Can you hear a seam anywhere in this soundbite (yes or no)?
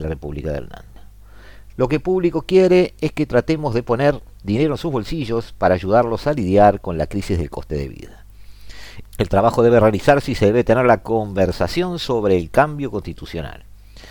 yes